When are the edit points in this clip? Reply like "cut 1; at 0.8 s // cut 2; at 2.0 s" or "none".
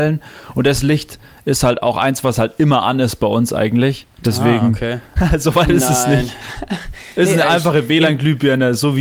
cut 1; at 5.2 s // cut 2; at 6.5 s